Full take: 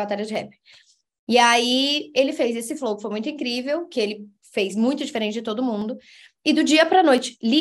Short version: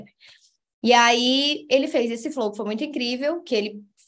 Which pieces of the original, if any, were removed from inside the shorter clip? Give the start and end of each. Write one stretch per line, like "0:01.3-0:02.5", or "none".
none